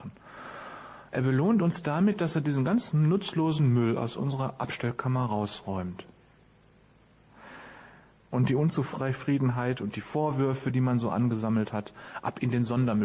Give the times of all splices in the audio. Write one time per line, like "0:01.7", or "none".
0:01.1
0:08.2